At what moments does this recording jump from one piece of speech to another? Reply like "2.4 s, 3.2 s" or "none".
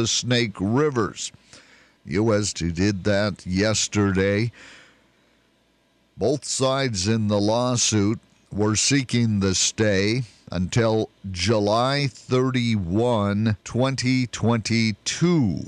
2.5 s, 13.6 s